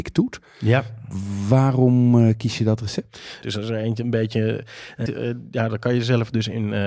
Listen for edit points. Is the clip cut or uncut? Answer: cut